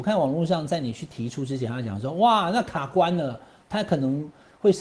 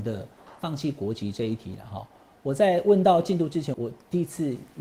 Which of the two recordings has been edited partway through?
second; 1 cut; at 3.7 s

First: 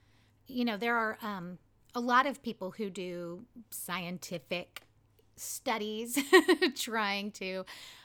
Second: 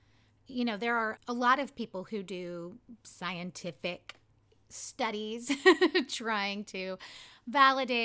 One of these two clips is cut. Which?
second; 1 cut; at 1.2 s

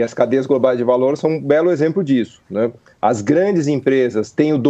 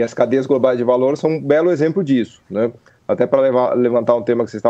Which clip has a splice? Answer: second; 1 cut; at 2.9 s

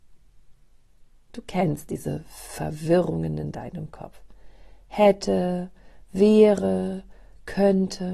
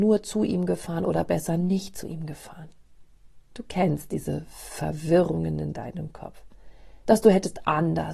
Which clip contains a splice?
second; 2 cuts; at 3.5 s, 7.0 s

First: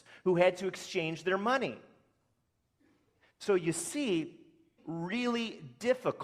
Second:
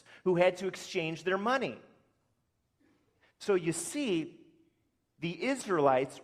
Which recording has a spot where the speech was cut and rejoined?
first; 1 cut; at 4.8 s

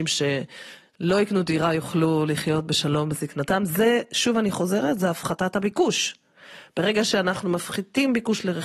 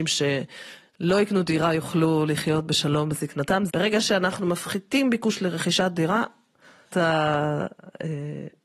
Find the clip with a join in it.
second; 2 cuts; at 3.7 s, 6.9 s

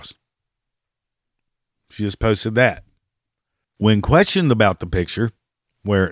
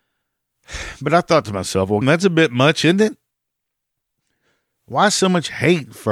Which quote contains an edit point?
second; 1 cut; at 2.0 s

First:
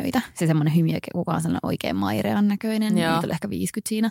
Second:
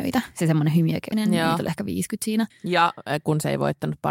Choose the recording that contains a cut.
second; 2 cuts; at 1.1 s, 2.5 s

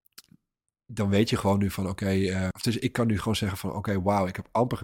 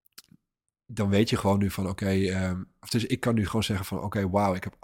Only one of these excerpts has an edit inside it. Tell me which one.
first; 1 cut; at 2.5 s

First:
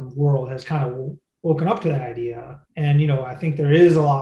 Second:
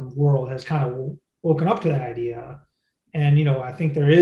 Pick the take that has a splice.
first; 1 cut; at 2.6 s

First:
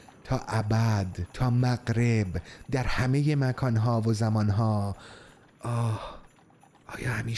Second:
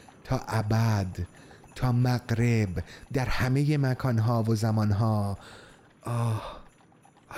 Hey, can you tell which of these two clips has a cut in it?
first; 1 cut; at 1.3 s

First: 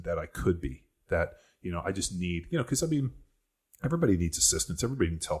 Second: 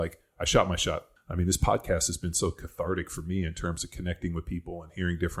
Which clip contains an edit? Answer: second; 1 cut; at 1.2 s

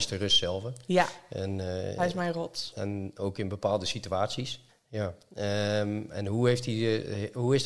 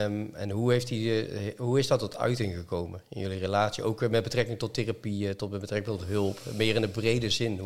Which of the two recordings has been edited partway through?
first; 1 cut; at 4.7 s

